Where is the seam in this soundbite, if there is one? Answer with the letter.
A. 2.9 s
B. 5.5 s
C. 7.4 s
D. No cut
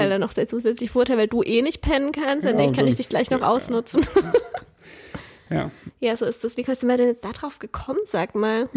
D